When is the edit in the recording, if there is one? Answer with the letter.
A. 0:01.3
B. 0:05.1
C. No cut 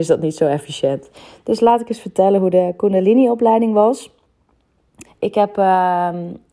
B